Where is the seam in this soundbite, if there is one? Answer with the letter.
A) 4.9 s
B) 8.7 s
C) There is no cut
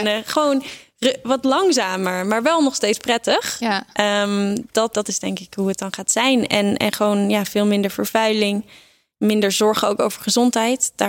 A